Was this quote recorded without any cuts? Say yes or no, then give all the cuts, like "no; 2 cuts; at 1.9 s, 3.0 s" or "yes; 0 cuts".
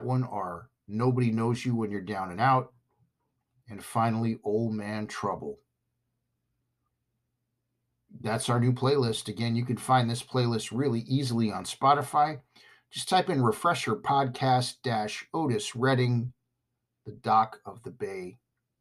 yes; 0 cuts